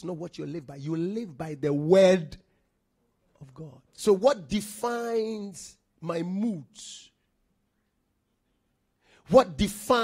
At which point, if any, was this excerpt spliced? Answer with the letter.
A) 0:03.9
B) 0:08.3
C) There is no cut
A